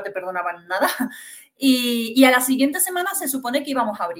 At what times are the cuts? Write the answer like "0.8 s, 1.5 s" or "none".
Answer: none